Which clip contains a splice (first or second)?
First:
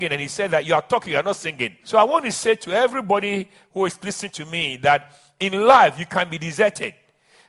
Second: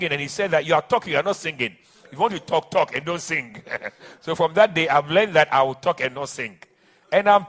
first